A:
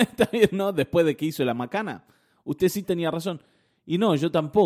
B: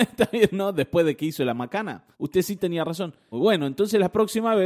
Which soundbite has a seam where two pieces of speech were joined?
B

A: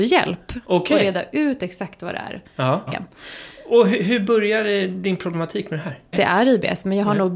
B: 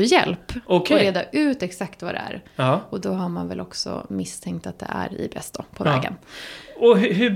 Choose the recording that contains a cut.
A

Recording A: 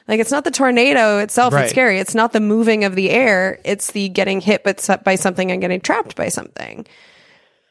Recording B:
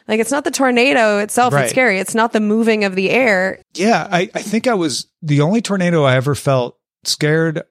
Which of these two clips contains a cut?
B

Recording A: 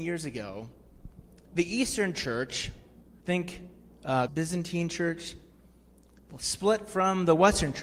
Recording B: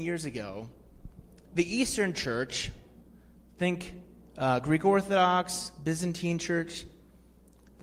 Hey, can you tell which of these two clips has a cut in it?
A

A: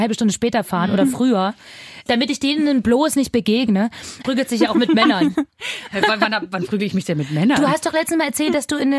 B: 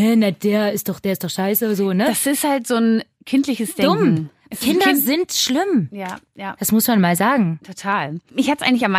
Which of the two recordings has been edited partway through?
A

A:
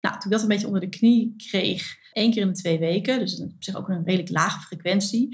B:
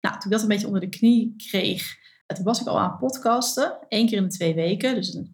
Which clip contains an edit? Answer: A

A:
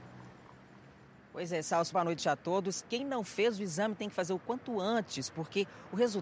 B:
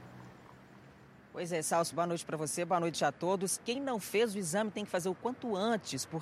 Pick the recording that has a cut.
A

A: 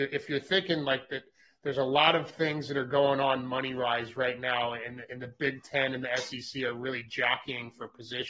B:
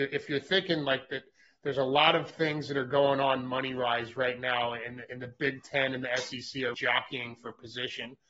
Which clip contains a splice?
B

